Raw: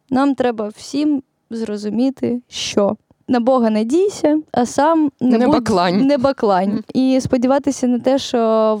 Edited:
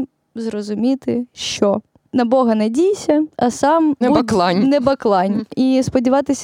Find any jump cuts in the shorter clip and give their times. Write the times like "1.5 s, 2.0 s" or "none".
4.0 s